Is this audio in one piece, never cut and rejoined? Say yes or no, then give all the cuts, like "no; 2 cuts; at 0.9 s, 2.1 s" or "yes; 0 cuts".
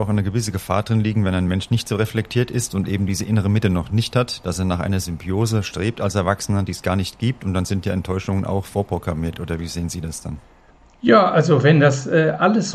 yes; 0 cuts